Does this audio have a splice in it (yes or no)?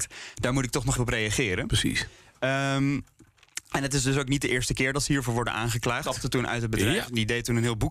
yes